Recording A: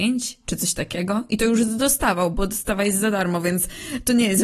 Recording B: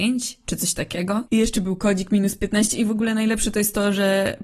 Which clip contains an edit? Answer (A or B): B